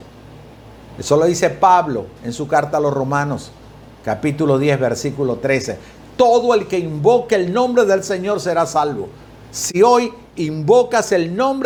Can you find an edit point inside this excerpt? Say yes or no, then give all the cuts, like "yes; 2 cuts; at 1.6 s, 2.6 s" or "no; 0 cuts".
no; 0 cuts